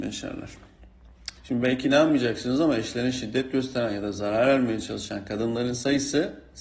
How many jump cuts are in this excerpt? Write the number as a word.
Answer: one